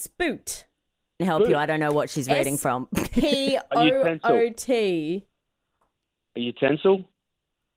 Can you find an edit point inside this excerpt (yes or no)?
yes